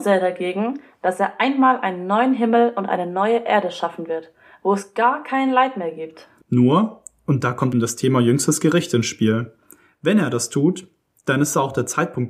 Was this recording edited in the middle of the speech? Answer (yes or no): yes